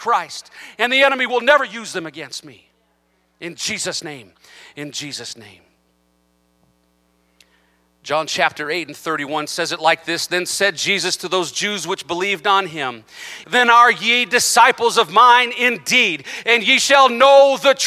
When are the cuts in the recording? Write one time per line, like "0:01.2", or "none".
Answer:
0:13.4